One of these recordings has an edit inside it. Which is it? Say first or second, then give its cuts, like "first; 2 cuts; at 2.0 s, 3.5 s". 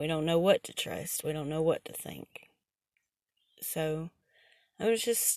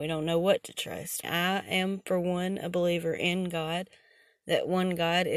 second; 1 cut; at 1.2 s